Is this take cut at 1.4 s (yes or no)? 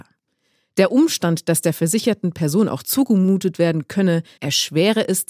no